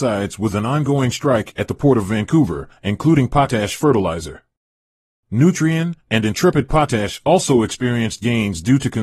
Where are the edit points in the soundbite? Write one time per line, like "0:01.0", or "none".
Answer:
0:02.8
0:06.0